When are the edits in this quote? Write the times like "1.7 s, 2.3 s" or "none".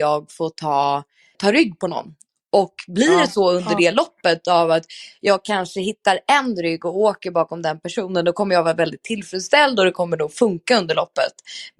1.3 s